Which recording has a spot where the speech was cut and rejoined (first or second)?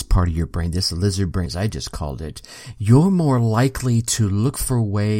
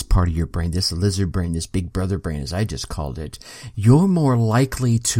first